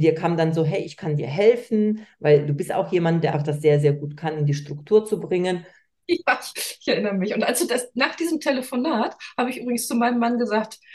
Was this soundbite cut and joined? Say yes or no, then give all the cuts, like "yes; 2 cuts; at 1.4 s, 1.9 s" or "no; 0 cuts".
yes; 2 cuts; at 3.3 s, 6.0 s